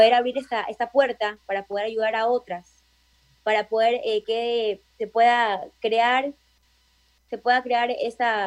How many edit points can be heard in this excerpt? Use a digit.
1